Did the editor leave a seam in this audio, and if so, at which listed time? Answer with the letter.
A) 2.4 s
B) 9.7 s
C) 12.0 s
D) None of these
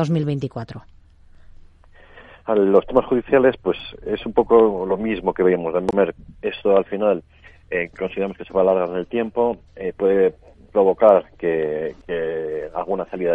C